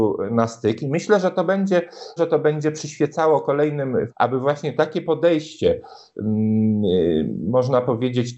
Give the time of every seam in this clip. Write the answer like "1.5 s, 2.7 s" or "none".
2.2 s, 4.1 s